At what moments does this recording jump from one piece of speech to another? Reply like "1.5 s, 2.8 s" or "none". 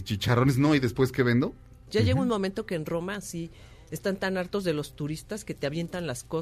1.9 s